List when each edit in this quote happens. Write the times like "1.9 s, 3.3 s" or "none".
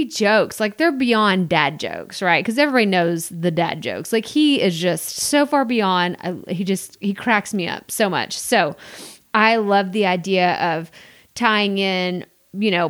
none